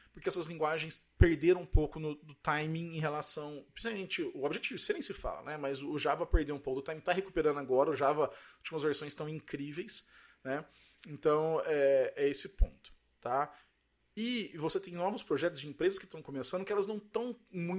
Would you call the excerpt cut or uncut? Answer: uncut